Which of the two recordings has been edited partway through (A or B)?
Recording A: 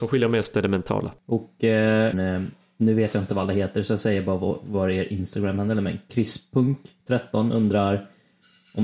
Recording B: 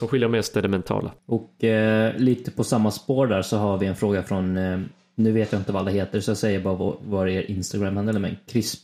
A